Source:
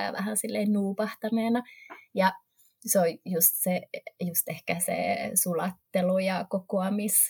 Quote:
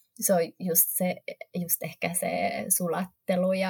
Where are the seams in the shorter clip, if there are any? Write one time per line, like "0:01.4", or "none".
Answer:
none